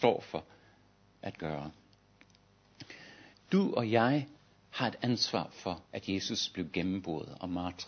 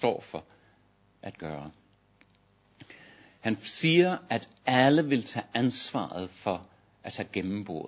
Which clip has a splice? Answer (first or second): first